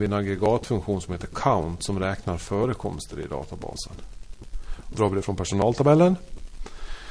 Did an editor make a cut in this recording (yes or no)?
yes